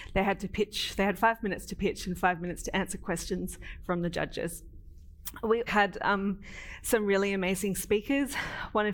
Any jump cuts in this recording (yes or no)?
yes